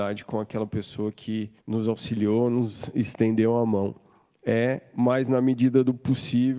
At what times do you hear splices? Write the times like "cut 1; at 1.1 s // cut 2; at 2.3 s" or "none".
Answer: cut 1; at 1.6 s // cut 2; at 4.4 s